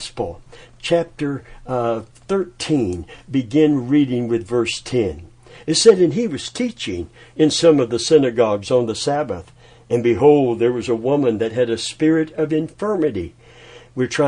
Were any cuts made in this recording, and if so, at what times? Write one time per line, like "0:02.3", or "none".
none

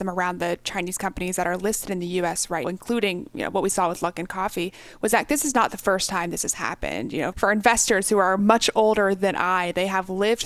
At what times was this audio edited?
0:02.6
0:07.3

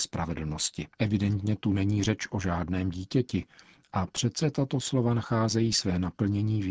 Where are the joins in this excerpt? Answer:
0:00.9

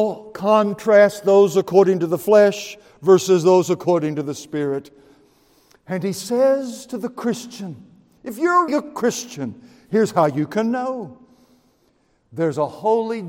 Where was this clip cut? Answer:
0:08.7

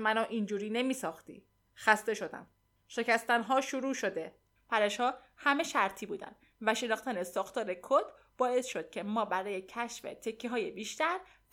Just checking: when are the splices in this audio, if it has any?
0:04.6

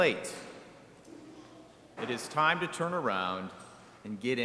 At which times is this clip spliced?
0:02.0

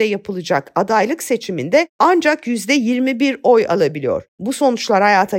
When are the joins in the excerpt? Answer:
none

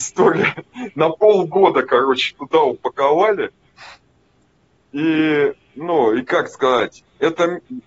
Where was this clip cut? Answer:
none

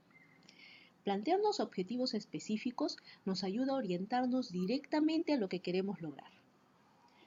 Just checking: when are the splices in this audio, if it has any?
none

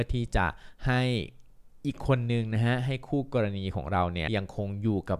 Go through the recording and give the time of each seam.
0:04.3

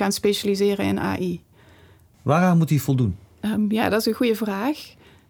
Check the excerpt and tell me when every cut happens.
0:02.1

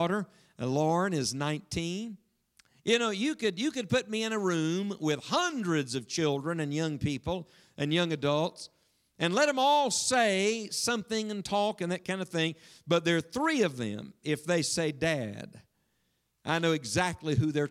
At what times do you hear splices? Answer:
none

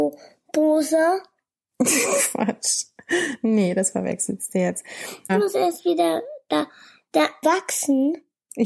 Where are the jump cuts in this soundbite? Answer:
0:05.3
0:07.4

